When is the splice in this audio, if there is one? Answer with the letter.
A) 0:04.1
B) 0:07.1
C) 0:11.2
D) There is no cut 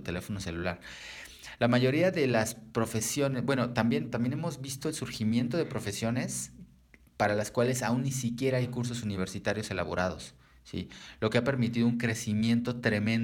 A